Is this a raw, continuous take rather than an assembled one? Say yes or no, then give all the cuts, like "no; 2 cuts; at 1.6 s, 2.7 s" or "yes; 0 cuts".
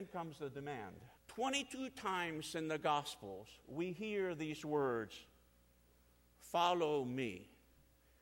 no; 1 cut; at 1.2 s